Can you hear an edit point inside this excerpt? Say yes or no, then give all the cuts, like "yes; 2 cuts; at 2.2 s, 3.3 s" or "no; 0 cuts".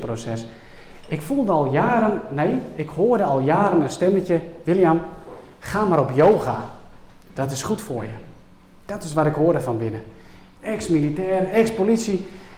yes; 1 cut; at 10.5 s